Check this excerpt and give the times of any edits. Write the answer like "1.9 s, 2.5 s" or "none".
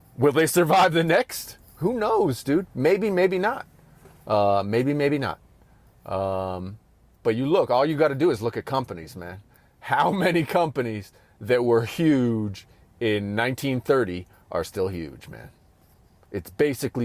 none

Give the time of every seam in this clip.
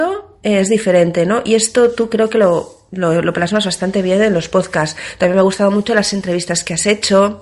none

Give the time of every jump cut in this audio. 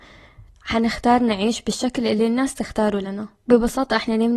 3.4 s

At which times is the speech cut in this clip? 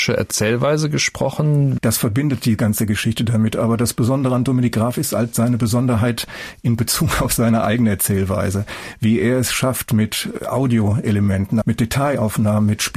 1.8 s, 11.6 s

